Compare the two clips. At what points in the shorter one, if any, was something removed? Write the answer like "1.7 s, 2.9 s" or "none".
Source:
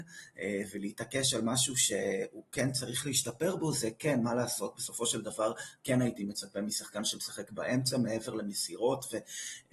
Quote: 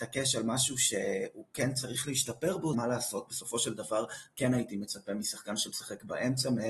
2.7 s